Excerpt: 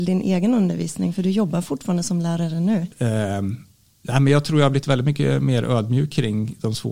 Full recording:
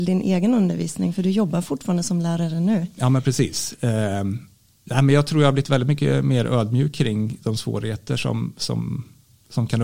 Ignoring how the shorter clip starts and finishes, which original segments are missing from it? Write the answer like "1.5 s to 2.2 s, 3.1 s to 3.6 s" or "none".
2.9 s to 3.7 s